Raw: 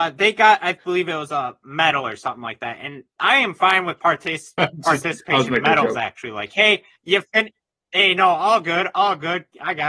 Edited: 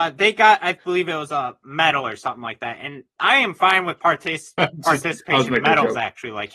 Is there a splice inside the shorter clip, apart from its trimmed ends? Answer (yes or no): no